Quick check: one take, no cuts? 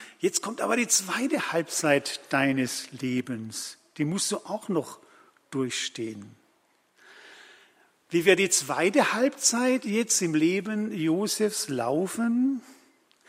yes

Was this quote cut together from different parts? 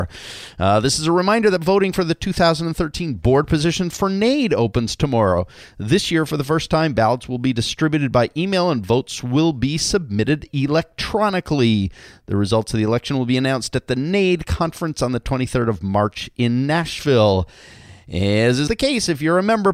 yes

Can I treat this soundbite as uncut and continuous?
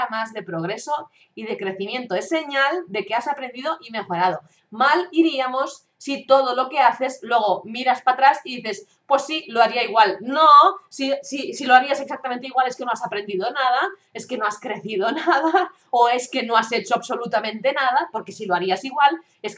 yes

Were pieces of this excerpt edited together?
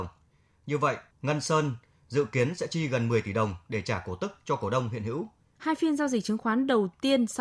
yes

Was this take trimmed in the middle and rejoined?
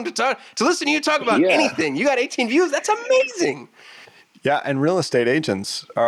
no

